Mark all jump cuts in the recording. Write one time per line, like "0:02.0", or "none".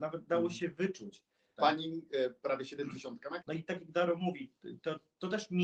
0:01.6
0:03.4